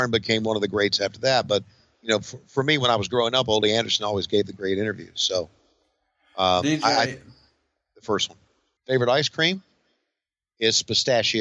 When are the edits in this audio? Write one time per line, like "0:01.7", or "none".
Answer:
0:08.8